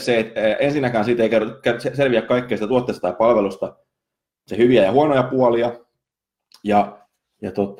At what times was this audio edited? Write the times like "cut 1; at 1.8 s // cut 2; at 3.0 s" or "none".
none